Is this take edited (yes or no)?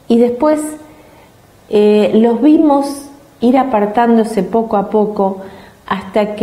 no